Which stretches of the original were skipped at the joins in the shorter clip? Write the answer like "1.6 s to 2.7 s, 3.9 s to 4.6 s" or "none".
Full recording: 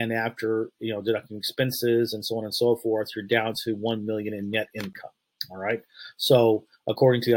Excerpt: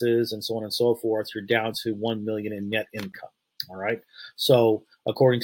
none